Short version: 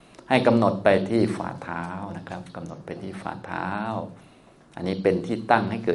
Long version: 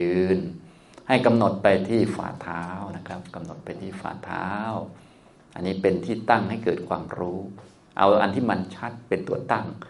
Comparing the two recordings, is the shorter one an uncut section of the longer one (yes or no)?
yes